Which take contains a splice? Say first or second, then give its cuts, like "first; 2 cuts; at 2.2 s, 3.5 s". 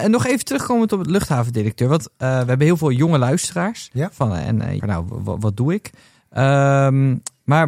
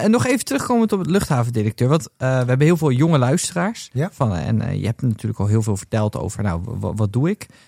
first; 1 cut; at 4.8 s